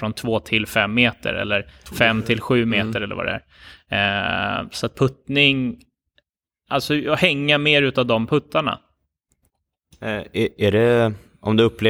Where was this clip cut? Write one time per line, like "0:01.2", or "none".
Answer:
none